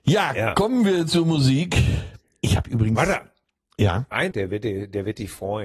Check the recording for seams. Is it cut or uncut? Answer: cut